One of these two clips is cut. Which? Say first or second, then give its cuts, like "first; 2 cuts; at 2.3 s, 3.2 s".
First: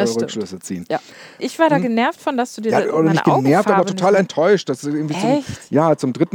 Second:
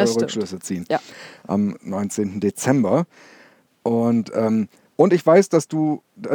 first; 1 cut; at 1.4 s